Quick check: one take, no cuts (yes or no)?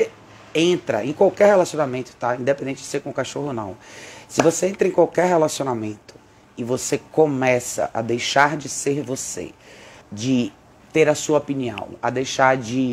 no